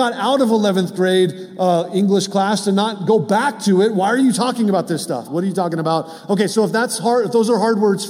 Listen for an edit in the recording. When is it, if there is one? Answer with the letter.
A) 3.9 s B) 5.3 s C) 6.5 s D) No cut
B